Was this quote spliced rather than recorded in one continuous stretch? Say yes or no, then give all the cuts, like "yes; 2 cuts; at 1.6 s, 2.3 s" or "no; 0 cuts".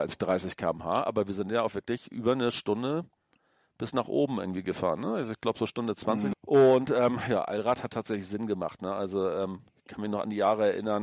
yes; 1 cut; at 6.3 s